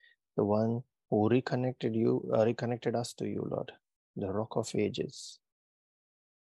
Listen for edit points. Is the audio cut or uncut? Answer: cut